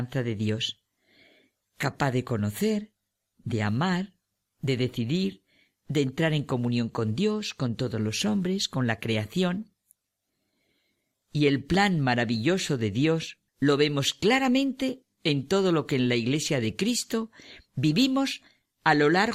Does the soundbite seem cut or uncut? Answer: cut